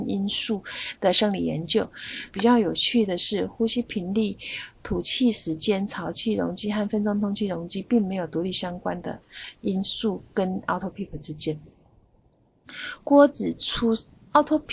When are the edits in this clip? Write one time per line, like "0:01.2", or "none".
0:02.3